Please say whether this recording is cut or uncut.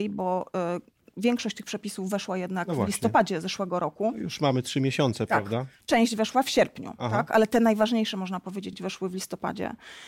uncut